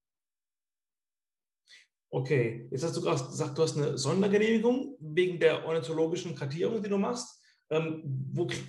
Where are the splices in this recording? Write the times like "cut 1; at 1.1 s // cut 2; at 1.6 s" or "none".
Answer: none